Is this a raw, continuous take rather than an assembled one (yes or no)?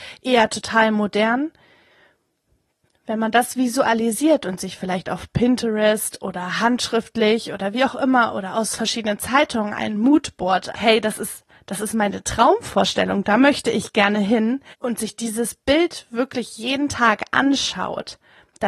no